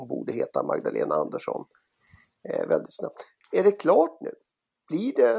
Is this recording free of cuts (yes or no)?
yes